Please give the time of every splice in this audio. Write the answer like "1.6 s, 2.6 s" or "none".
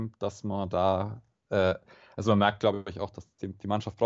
none